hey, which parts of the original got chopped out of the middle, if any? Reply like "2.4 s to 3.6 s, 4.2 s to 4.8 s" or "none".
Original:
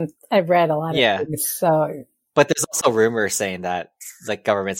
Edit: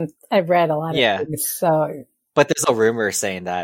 2.7 s to 2.8 s